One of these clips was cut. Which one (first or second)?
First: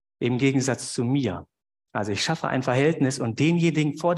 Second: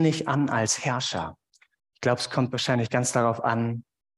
second